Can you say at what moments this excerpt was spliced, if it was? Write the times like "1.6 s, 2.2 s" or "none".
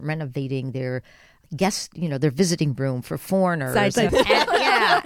4.1 s